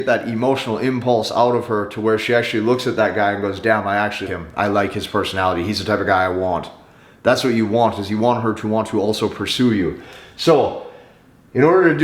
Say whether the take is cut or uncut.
cut